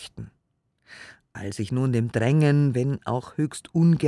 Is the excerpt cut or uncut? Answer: uncut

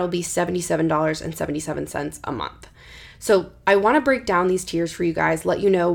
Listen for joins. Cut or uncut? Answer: uncut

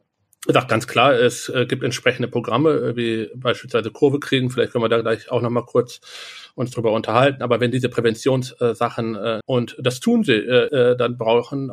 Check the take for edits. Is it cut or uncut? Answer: cut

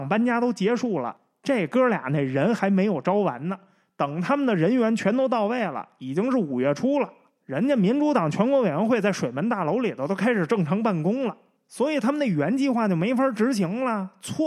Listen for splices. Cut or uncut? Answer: uncut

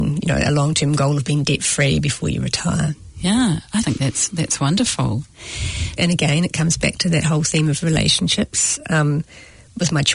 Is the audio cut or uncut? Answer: cut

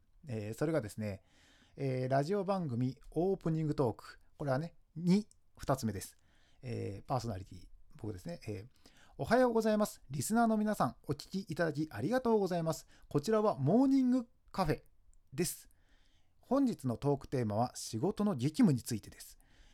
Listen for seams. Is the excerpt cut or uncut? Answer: uncut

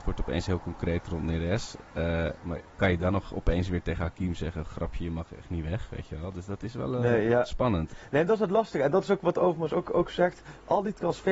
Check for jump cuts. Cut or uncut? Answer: uncut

